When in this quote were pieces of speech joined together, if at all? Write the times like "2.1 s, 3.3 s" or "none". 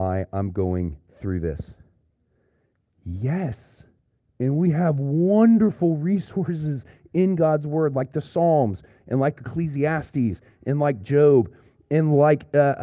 none